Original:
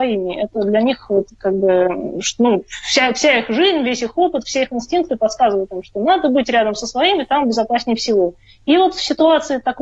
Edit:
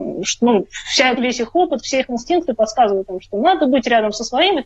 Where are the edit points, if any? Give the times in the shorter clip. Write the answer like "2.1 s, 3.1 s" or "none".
1.2 s